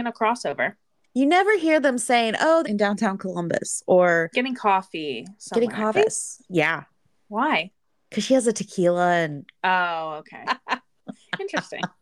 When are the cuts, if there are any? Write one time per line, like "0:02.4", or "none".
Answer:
0:02.6
0:05.9
0:10.4